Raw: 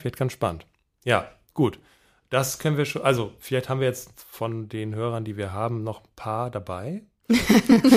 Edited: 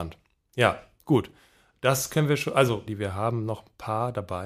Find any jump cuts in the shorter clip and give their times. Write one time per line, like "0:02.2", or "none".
0:02.9